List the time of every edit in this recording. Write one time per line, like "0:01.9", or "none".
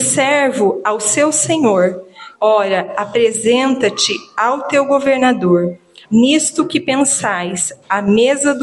0:02.3
0:06.0